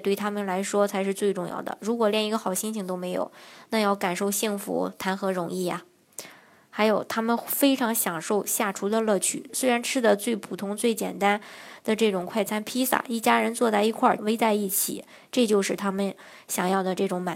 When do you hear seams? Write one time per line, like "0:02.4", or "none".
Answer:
0:09.5
0:14.2